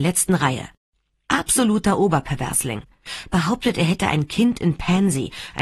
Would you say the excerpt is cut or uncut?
uncut